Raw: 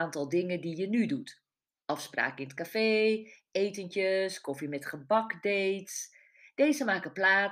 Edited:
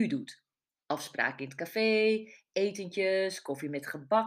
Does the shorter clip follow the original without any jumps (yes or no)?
yes